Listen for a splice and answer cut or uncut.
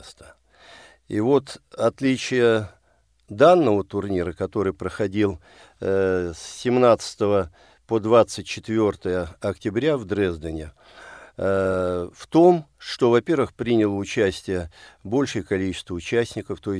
uncut